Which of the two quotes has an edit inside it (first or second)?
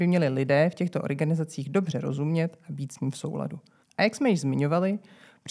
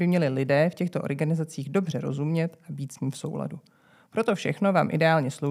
first